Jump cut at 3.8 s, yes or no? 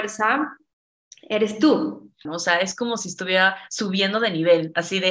no